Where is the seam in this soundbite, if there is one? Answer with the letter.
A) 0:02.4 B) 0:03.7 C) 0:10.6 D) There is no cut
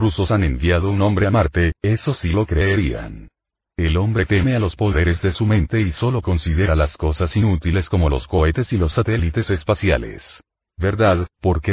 C